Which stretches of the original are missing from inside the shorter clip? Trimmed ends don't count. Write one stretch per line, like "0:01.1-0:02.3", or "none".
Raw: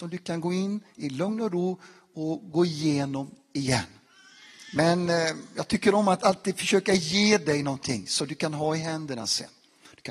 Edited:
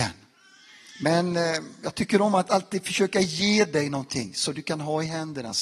none